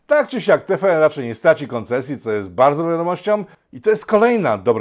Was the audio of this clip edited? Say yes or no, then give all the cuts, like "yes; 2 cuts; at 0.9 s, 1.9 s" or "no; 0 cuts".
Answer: yes; 1 cut; at 3.5 s